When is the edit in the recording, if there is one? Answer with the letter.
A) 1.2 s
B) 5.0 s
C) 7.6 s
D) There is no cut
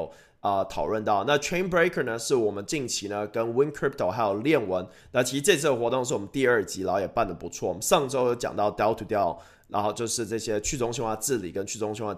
B